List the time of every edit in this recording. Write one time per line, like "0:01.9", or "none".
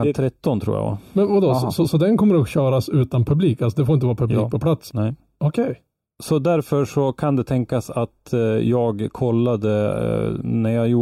none